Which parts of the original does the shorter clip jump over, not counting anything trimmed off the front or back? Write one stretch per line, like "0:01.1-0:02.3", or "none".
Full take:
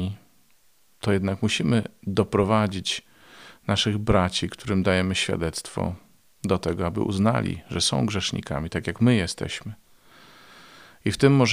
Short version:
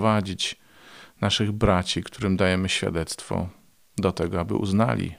none